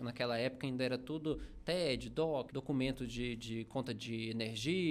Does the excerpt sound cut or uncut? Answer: cut